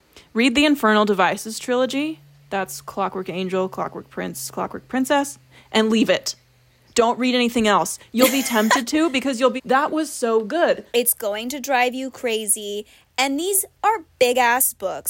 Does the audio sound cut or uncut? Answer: cut